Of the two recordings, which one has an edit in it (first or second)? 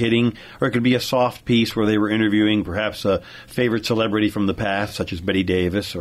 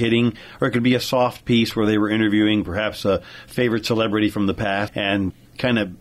second